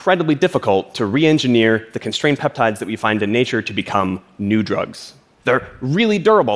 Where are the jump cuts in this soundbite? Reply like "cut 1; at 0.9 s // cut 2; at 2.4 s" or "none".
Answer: cut 1; at 5.4 s